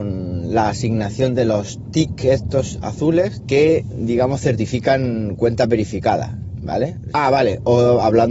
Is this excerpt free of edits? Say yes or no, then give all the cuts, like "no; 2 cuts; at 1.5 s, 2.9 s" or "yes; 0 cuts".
no; 2 cuts; at 3.4 s, 7.1 s